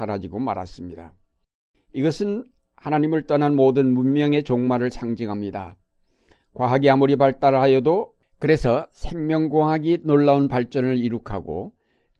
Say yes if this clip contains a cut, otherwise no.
no